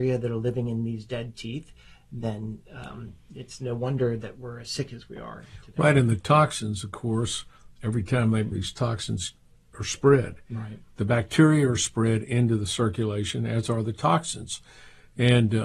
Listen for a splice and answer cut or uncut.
cut